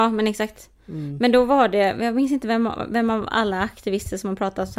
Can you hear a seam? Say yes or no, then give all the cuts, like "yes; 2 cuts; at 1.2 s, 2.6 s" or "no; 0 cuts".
no; 0 cuts